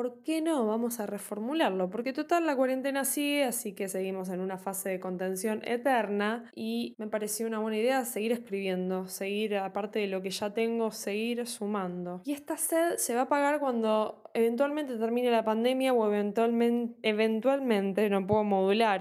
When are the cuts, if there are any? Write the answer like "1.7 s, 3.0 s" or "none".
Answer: none